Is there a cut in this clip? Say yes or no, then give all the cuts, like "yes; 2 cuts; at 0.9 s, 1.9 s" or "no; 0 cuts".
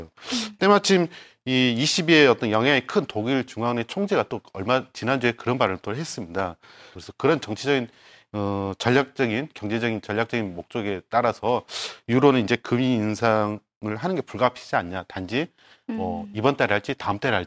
yes; 1 cut; at 7.0 s